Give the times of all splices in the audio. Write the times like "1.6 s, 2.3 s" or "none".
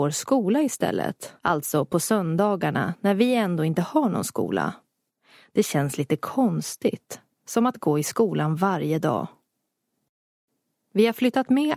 1.4 s